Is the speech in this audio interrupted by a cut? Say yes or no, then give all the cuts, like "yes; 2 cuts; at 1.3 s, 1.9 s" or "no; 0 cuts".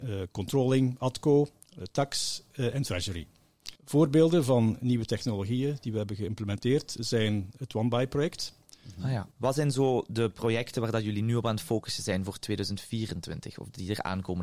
yes; 2 cuts; at 3.8 s, 9.3 s